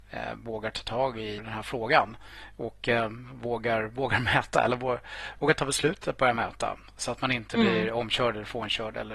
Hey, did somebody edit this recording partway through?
yes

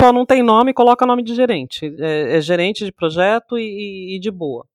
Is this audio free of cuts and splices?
yes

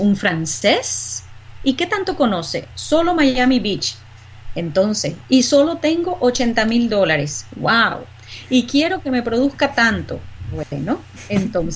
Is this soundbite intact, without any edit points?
yes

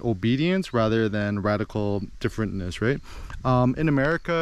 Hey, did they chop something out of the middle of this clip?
no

